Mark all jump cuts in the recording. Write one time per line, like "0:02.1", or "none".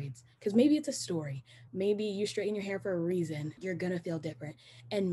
0:01.7
0:03.6